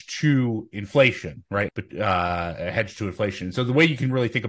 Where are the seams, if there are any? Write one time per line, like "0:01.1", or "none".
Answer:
0:01.7